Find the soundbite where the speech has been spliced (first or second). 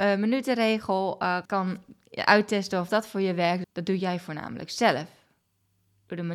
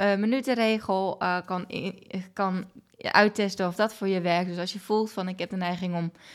first